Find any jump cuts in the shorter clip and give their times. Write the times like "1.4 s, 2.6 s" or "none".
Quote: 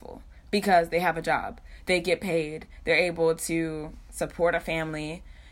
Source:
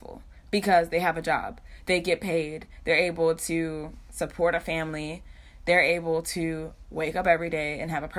none